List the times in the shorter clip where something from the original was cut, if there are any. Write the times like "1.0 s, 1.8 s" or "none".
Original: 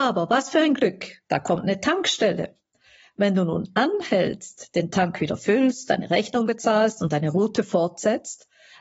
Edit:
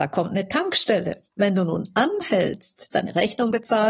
1.3 s, 2.9 s